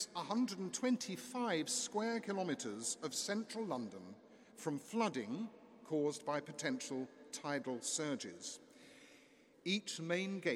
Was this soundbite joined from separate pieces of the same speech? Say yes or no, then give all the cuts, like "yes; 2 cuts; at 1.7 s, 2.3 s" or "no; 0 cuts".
yes; 1 cut; at 9.5 s